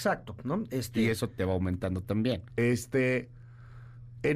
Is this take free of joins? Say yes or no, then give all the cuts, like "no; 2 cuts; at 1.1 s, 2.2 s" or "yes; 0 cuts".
no; 2 cuts; at 1.3 s, 2.5 s